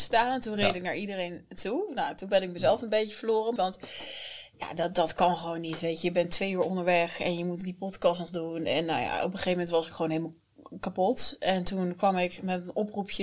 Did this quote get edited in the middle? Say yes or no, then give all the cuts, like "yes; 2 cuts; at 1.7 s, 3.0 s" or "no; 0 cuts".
yes; 1 cut; at 3.6 s